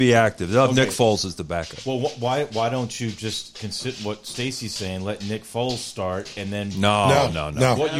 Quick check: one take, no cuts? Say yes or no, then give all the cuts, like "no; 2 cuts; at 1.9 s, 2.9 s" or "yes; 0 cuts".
yes; 0 cuts